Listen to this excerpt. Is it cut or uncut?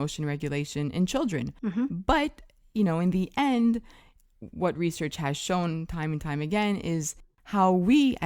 uncut